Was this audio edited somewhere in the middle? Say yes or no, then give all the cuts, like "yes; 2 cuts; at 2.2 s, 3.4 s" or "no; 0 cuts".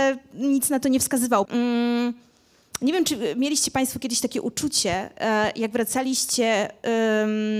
yes; 1 cut; at 1.5 s